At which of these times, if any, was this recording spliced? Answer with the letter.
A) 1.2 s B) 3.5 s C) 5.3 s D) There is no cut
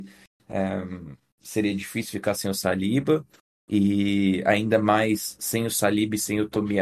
D